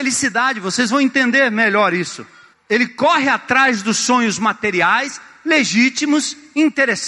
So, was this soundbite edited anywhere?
yes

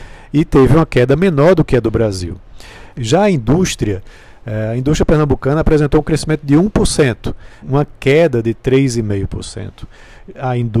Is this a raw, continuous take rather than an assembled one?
no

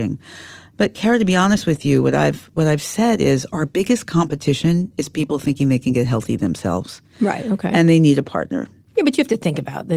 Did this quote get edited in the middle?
no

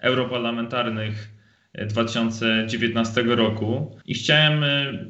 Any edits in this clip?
yes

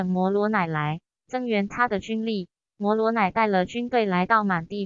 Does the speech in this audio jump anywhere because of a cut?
yes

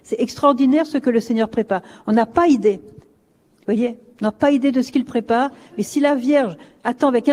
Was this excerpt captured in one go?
yes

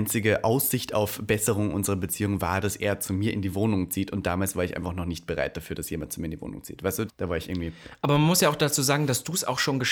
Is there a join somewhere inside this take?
yes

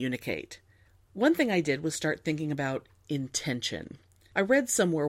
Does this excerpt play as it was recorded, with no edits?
no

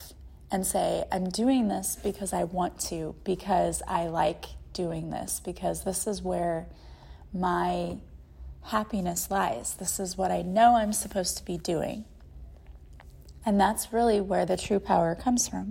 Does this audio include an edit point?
no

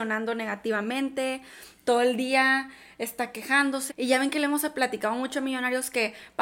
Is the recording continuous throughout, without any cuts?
no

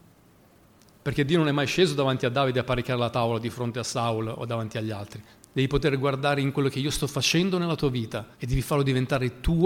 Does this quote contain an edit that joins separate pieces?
yes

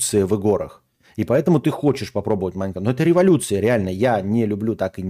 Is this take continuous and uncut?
yes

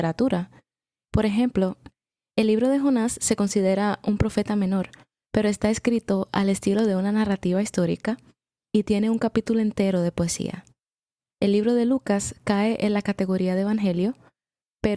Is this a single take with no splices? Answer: yes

